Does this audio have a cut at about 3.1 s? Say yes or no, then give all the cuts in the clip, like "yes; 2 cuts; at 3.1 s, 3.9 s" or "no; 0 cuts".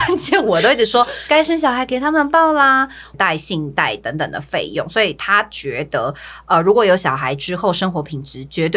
yes; 1 cut; at 3.1 s